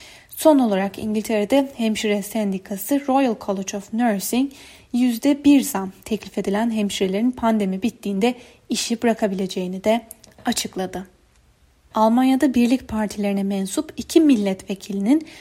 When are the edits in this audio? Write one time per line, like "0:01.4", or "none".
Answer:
0:11.9